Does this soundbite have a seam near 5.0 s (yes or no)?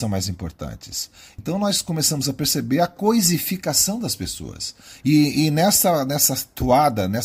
yes